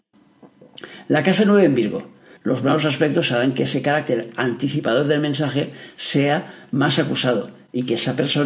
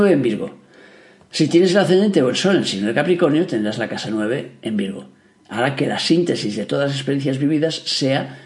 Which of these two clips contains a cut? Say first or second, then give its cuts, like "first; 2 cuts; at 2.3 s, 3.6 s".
first; 1 cut; at 2.4 s